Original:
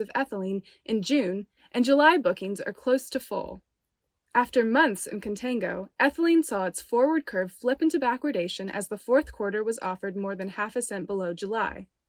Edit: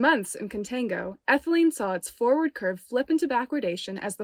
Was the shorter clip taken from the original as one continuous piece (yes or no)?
yes